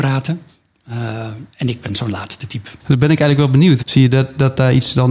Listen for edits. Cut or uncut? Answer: cut